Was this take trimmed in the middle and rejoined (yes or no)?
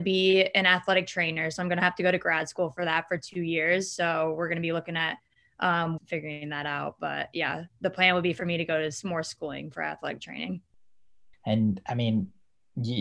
yes